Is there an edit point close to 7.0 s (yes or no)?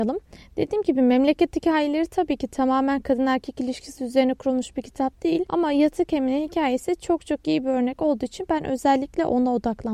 no